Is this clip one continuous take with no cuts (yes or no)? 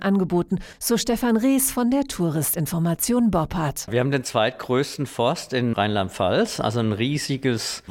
yes